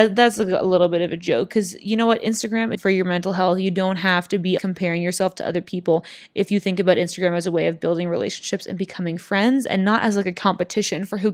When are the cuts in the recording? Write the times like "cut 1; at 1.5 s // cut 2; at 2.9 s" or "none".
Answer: cut 1; at 2.8 s // cut 2; at 4.6 s